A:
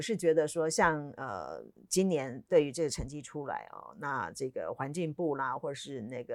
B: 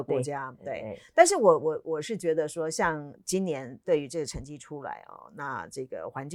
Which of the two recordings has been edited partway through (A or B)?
B